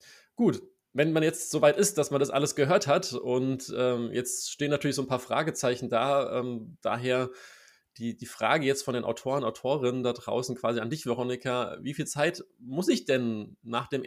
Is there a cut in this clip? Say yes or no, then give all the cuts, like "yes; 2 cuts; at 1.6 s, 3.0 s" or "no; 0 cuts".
no; 0 cuts